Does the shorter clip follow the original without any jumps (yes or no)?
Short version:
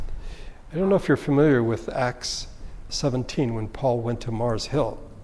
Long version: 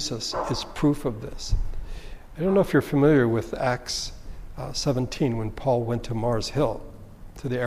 no